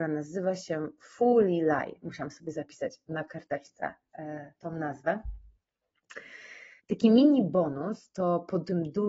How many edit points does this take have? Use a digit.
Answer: 1